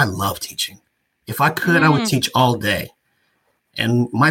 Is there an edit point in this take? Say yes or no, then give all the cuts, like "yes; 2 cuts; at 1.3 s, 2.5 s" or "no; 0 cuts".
no; 0 cuts